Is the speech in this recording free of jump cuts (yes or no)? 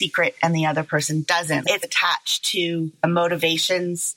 no